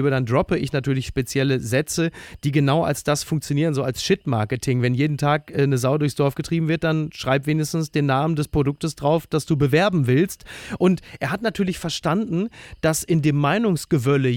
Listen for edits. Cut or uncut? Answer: uncut